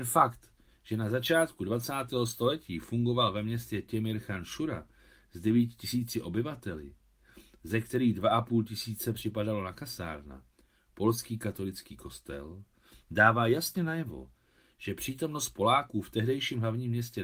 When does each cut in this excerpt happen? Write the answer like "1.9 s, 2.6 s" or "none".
none